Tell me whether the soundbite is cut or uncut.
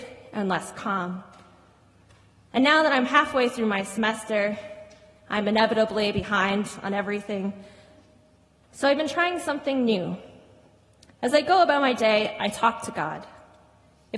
uncut